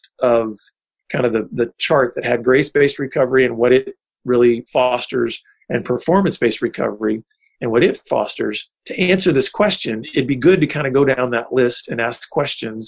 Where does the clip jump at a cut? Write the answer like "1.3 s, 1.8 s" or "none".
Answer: none